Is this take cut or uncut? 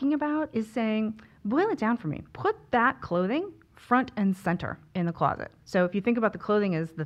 cut